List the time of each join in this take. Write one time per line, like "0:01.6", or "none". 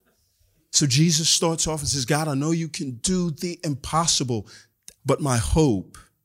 0:05.0